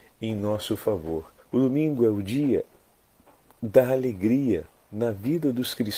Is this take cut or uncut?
cut